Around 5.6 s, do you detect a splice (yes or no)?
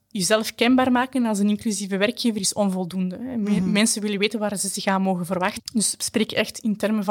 yes